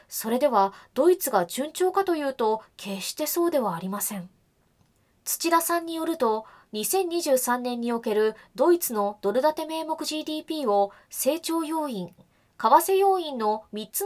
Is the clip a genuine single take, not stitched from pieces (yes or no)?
no